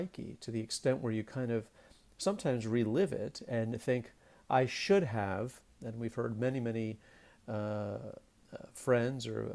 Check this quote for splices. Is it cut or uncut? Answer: uncut